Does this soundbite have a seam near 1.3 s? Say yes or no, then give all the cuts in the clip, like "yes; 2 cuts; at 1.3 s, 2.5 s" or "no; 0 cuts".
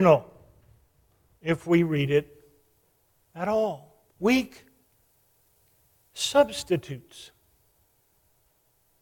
no; 1 cut; at 4.1 s